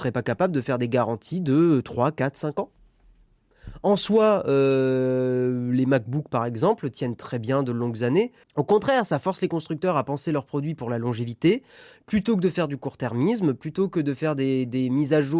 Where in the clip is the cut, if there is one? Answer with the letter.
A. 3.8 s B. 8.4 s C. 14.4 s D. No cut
B